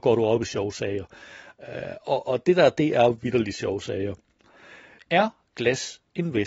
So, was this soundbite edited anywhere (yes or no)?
yes